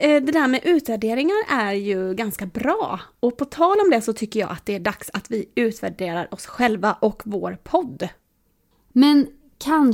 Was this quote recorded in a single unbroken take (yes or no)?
no